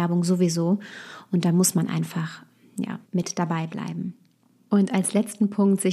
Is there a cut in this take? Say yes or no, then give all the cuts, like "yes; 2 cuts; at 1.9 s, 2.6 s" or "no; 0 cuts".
yes; 1 cut; at 3.0 s